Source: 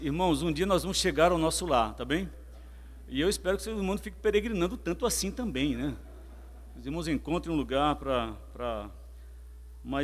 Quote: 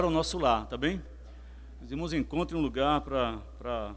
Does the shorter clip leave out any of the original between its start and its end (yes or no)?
yes